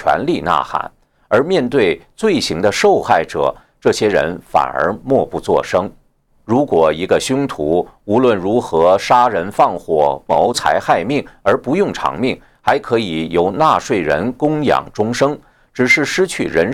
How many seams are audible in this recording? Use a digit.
0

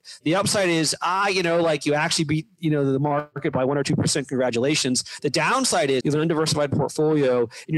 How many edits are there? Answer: 1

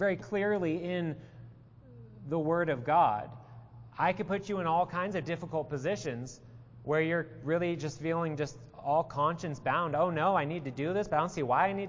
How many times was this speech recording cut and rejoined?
0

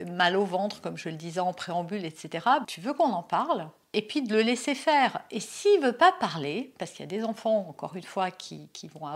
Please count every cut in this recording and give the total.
1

